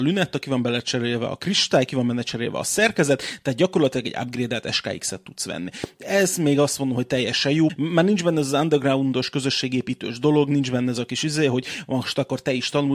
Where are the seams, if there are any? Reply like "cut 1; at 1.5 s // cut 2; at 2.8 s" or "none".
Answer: none